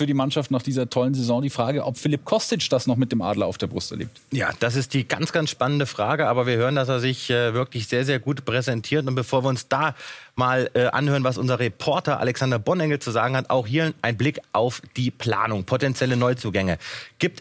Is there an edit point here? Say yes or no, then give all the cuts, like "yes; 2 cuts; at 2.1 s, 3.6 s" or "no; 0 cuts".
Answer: no; 0 cuts